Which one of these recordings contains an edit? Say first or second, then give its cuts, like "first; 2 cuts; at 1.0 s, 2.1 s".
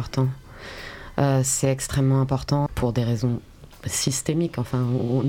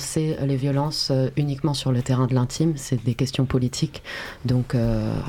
first; 1 cut; at 2.7 s